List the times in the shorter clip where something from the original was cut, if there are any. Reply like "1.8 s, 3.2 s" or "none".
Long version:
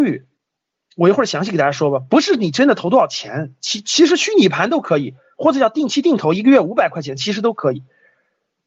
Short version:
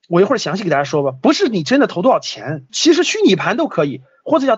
2.7 s